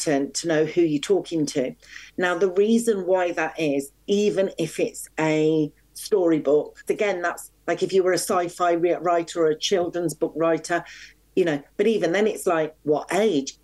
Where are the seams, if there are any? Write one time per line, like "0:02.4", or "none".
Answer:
0:06.9